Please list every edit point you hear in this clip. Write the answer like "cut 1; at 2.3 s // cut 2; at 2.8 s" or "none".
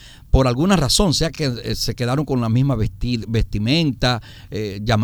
none